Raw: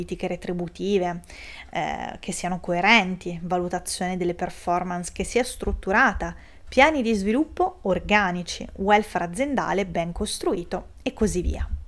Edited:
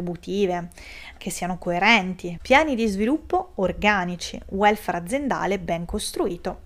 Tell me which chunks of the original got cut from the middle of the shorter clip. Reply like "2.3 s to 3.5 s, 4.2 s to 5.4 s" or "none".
1.7 s to 2.2 s, 3.4 s to 6.6 s